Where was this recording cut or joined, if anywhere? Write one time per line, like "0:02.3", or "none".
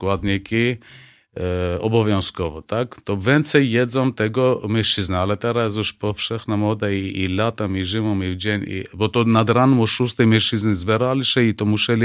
none